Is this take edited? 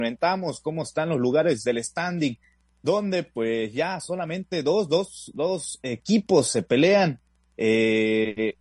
no; 0 cuts

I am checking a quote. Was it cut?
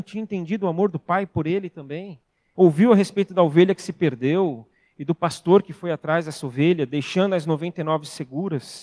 yes; 1 cut; at 2.5 s

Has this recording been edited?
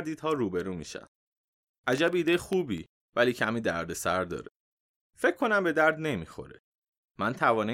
yes; 1 cut; at 1.7 s

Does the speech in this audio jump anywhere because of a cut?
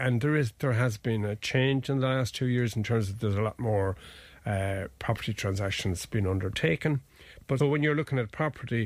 yes; 1 cut; at 7.6 s

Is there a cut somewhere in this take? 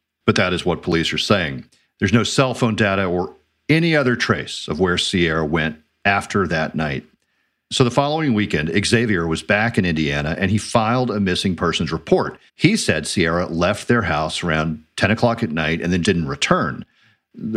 yes; 2 cuts; at 12.5 s, 16.0 s

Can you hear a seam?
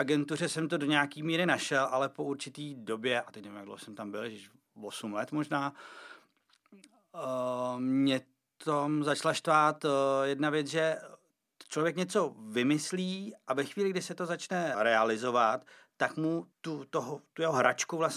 yes; 2 cuts; at 14.7 s, 16.5 s

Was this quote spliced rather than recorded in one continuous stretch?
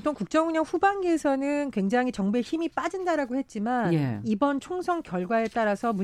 no; 0 cuts

